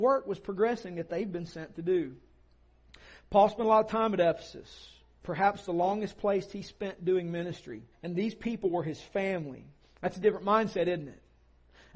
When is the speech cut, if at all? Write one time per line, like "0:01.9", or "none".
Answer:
0:07.9
0:09.8